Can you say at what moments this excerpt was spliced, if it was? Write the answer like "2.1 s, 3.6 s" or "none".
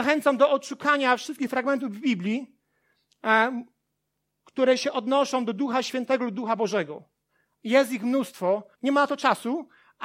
8.7 s